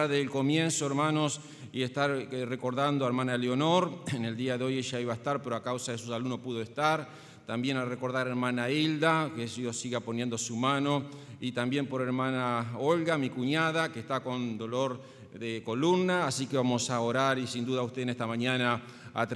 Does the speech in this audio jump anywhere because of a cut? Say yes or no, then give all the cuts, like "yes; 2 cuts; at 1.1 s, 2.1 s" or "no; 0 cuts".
no; 0 cuts